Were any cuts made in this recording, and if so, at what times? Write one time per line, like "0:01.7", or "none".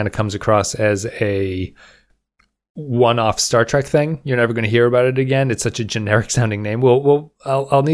none